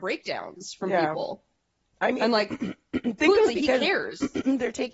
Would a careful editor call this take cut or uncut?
cut